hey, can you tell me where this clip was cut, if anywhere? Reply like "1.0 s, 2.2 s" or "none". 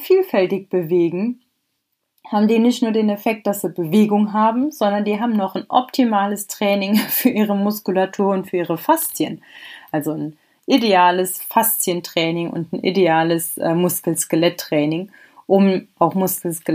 none